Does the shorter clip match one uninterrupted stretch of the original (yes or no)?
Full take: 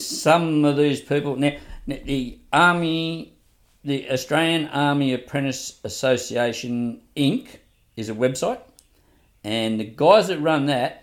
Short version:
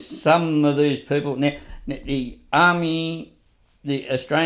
yes